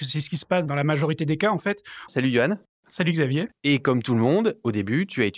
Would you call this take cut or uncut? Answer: cut